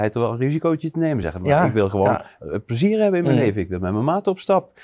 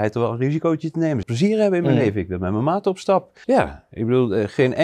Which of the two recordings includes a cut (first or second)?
second